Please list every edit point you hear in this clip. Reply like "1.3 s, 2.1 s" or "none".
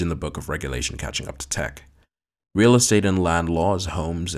2.4 s